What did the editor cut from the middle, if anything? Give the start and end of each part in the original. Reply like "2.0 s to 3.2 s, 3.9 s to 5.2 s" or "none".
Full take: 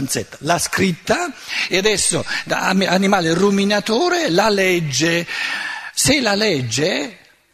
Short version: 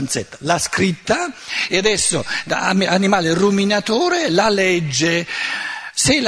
none

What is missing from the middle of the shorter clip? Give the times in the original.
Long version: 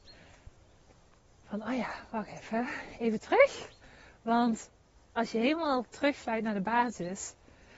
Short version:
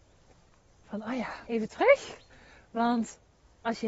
2.1 s to 3.0 s

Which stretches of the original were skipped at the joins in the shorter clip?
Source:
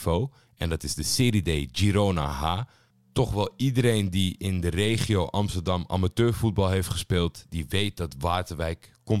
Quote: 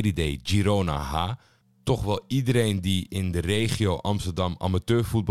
none

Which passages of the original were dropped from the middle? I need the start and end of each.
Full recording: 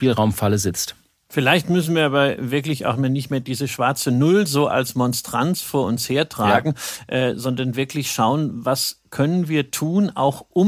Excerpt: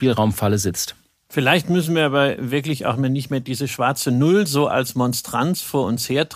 none

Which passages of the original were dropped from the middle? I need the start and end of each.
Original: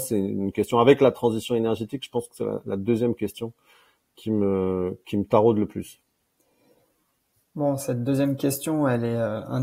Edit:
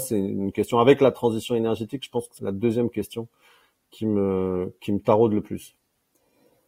2.4 s to 2.6 s

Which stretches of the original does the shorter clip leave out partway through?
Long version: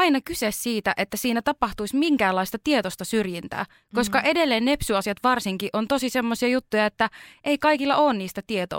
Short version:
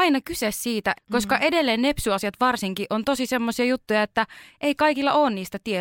0.9 s to 3.8 s

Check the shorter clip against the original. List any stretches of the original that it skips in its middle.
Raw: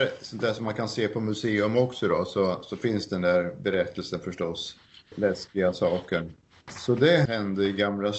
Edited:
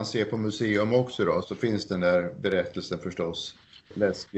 2.3 s to 2.6 s

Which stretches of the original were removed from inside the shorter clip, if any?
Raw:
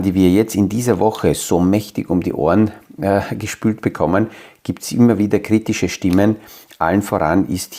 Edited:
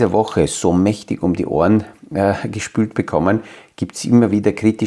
none

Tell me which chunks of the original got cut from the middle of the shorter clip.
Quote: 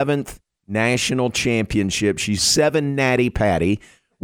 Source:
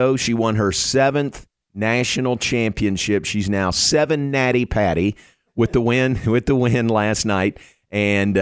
3.4 s to 3.7 s

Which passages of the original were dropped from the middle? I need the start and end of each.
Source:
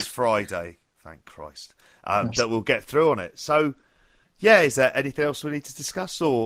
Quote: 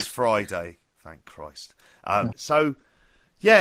2.3 s to 3.3 s

